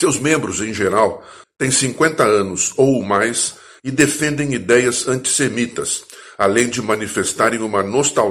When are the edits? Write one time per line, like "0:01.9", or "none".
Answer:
0:01.4